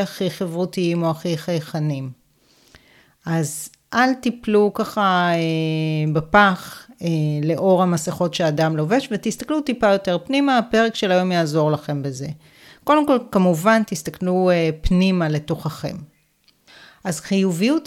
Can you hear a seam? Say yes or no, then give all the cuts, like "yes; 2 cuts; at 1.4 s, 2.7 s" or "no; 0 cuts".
no; 0 cuts